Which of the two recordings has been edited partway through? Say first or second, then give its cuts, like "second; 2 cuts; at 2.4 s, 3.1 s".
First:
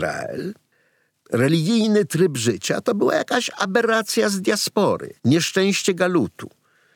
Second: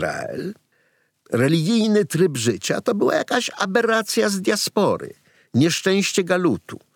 first; 1 cut; at 5.2 s